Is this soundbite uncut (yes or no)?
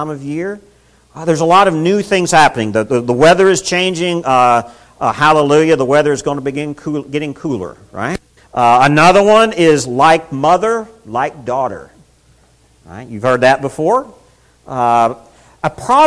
no